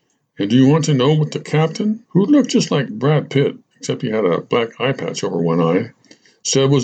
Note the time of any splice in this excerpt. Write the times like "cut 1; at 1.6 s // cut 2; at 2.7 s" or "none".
cut 1; at 2.0 s